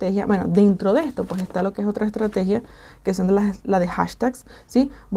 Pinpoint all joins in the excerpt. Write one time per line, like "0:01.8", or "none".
none

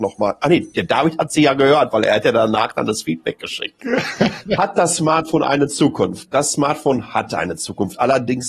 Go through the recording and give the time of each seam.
none

